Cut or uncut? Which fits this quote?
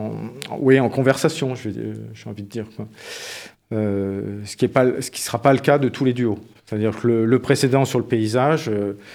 uncut